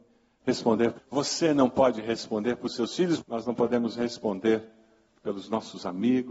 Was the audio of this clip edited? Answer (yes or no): yes